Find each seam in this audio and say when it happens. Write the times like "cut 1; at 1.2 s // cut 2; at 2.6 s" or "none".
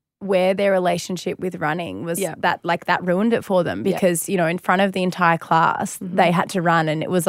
none